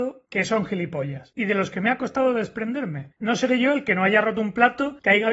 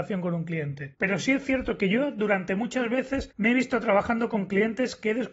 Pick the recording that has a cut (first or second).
first